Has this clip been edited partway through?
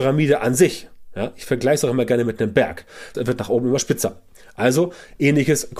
yes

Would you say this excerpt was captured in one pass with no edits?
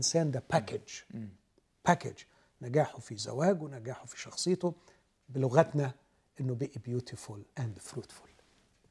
no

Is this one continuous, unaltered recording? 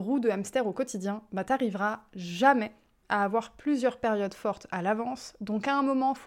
yes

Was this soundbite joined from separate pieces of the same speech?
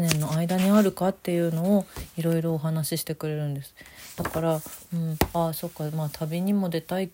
no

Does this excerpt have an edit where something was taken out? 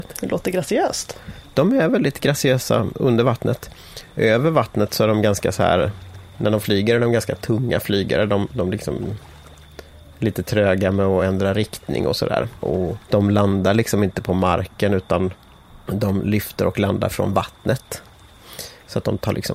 yes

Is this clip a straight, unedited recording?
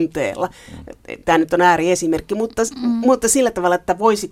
yes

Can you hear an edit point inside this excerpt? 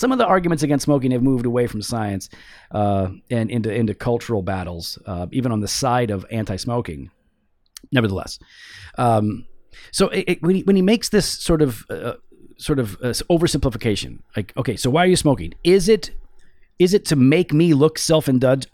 no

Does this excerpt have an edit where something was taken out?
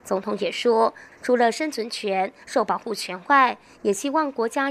yes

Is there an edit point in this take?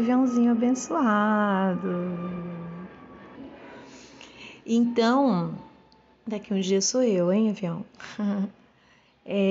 yes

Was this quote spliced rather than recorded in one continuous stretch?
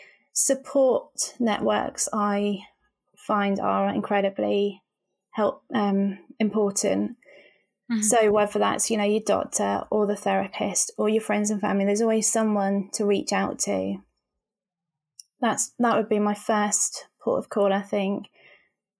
no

